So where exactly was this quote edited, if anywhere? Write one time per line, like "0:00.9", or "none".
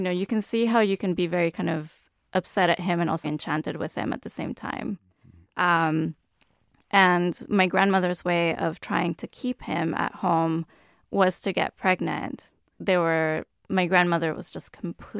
0:03.2
0:12.8